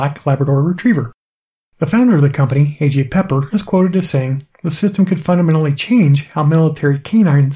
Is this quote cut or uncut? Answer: uncut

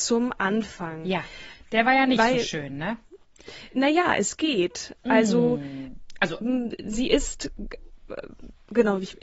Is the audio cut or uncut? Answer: uncut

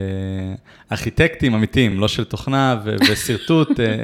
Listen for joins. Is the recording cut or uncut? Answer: uncut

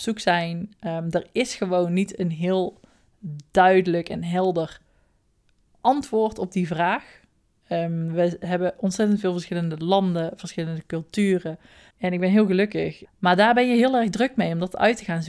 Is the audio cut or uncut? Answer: cut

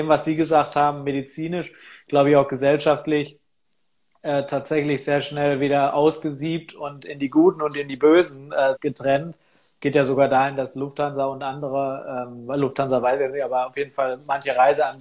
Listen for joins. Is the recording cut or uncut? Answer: cut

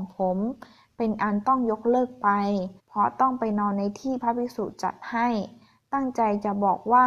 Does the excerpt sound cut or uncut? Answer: cut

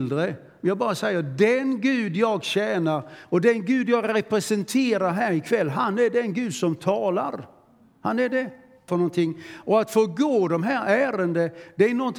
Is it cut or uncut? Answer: cut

